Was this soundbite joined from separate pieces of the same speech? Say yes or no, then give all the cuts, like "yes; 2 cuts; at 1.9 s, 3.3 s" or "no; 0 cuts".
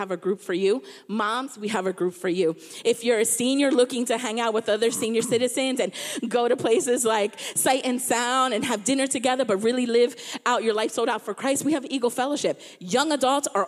no; 0 cuts